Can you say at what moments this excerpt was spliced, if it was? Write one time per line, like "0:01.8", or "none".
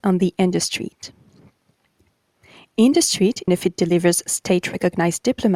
0:03.5